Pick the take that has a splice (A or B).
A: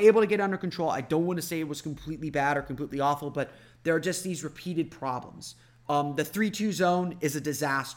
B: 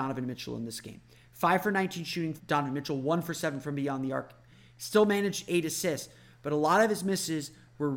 B